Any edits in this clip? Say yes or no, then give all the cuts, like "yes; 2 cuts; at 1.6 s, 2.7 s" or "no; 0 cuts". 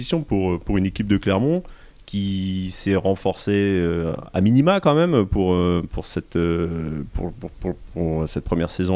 no; 0 cuts